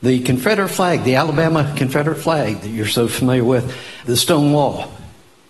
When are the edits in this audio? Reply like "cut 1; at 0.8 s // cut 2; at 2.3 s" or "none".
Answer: cut 1; at 4.0 s

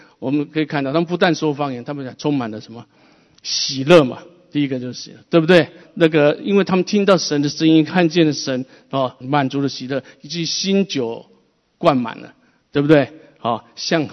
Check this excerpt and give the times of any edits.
cut 1; at 5.8 s // cut 2; at 9.2 s

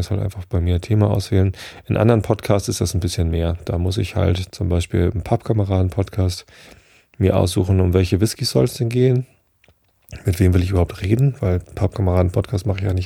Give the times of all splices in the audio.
none

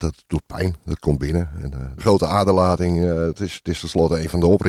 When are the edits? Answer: cut 1; at 2.0 s

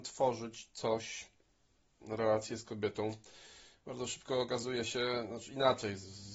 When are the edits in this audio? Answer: cut 1; at 2.0 s

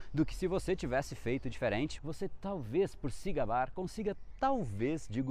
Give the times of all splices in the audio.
cut 1; at 2.0 s

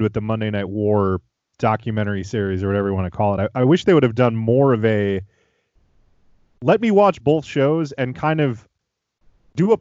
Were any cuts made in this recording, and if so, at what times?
none

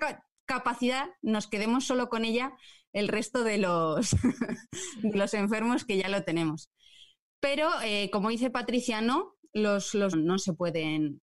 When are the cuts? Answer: cut 1; at 10.1 s

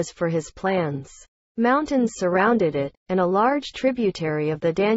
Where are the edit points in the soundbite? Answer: cut 1; at 1.4 s

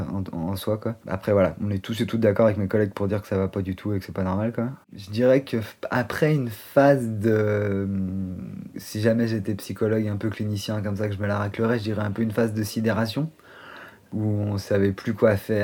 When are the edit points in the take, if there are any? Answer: cut 1; at 4.8 s

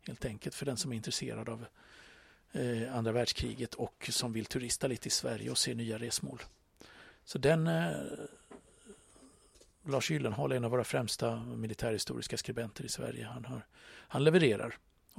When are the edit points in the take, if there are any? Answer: none

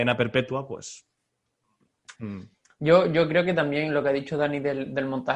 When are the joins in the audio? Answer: cut 1; at 2.1 s

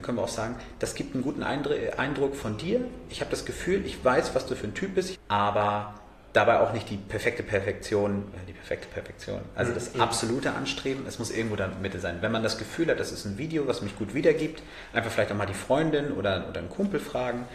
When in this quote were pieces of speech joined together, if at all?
cut 1; at 5.1 s

